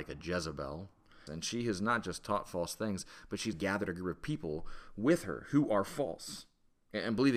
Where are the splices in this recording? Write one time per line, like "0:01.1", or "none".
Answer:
0:01.3
0:03.5